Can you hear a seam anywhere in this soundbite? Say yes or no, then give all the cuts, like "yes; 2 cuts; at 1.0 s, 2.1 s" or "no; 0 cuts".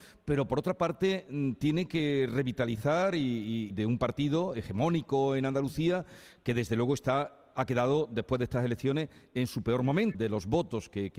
yes; 2 cuts; at 3.7 s, 10.1 s